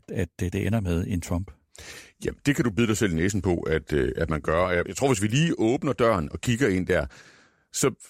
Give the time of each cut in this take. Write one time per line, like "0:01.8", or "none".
0:04.9